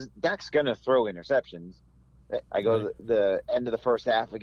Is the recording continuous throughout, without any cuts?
no; 1 cut; at 2.5 s

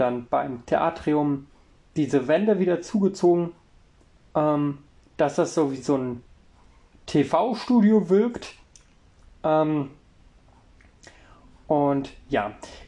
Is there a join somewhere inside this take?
no; 0 cuts

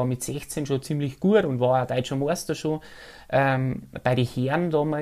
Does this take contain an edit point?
no; 0 cuts

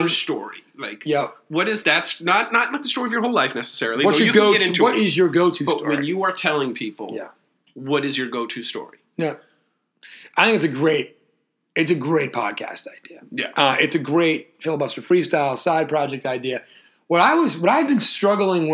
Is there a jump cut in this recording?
yes; 1 cut; at 1.8 s

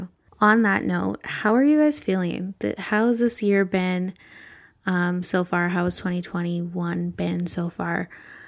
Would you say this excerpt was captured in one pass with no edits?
yes; 0 cuts

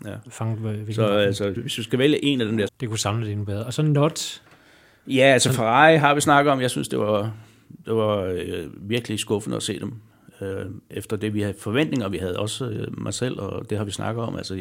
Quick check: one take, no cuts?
no; 2 cuts; at 1.6 s, 2.7 s

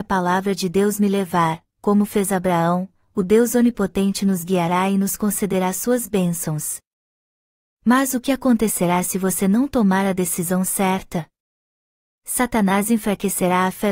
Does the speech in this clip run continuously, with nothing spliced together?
yes; 0 cuts

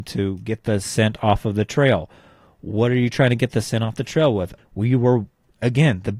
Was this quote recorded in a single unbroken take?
no; 1 cut; at 4.6 s

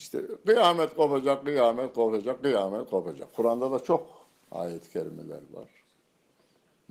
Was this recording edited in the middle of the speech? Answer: no; 0 cuts

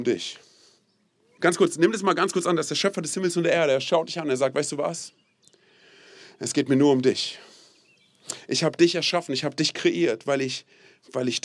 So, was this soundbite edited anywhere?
yes; 1 cut; at 1.4 s

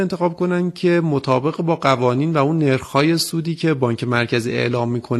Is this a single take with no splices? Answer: yes; 0 cuts

